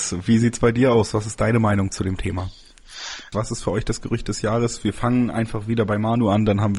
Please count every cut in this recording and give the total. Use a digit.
1